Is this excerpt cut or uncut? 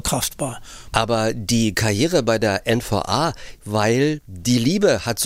cut